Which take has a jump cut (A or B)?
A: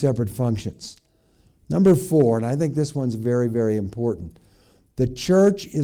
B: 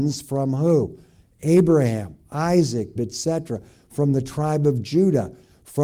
B